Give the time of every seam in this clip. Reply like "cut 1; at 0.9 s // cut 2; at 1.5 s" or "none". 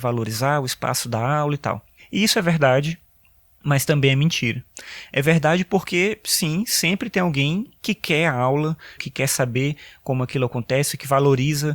cut 1; at 9.0 s

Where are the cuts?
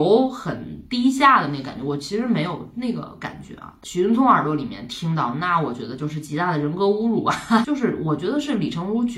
cut 1; at 7.6 s

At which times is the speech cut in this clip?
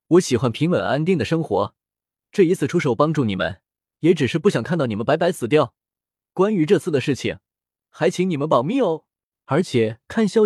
cut 1; at 9.3 s

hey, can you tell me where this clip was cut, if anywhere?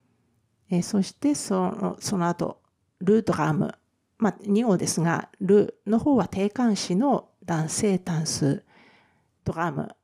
none

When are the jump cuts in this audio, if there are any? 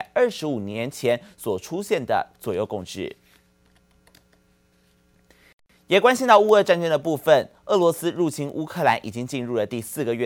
none

